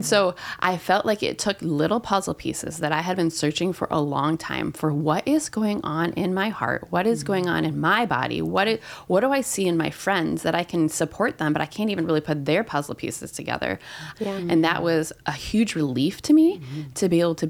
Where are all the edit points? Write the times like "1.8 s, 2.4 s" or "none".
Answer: 14.1 s, 15.2 s